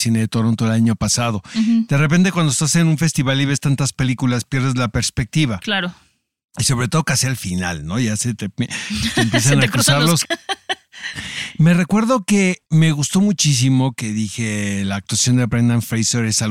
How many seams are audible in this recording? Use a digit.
2